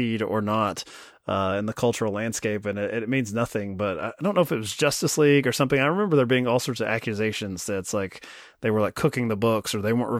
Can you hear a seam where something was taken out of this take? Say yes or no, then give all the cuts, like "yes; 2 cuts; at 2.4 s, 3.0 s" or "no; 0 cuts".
no; 0 cuts